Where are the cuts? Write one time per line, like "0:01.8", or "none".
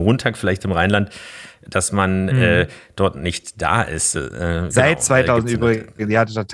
0:04.1